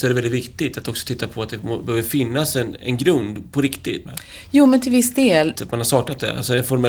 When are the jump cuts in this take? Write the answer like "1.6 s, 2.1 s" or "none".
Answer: 2.8 s, 4.1 s, 5.6 s